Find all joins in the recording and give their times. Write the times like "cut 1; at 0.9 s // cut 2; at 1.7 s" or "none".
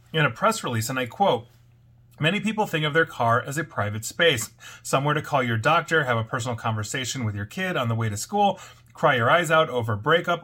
none